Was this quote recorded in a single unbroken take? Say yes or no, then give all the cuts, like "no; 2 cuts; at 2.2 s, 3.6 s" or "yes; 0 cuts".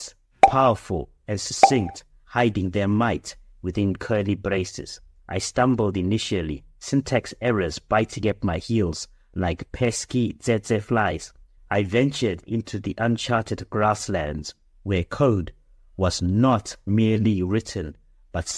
no; 1 cut; at 11.6 s